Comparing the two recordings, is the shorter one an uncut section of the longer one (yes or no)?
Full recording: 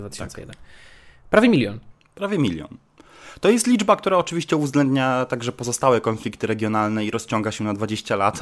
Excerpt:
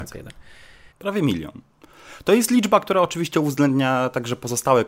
no